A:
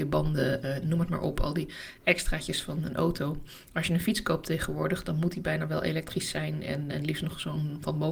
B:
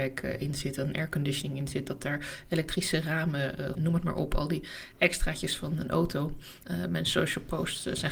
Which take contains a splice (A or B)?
B